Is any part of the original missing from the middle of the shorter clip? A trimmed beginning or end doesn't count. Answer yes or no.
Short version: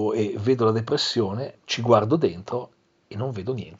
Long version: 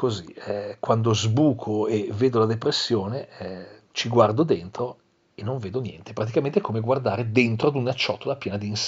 yes